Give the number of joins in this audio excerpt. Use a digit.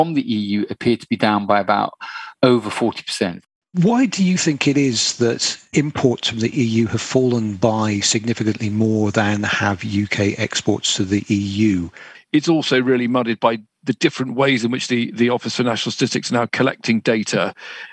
2